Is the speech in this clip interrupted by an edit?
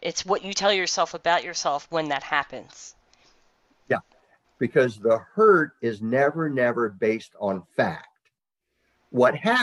yes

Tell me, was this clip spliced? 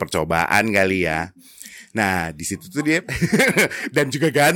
no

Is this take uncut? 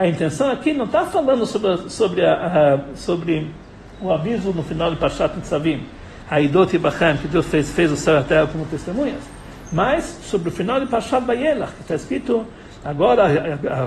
yes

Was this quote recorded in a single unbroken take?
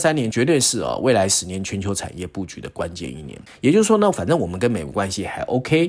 no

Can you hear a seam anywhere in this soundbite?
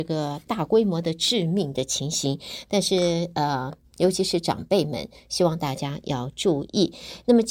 no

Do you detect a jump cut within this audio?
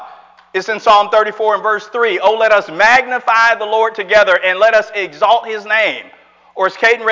no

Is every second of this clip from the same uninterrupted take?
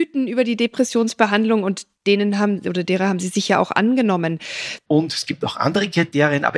no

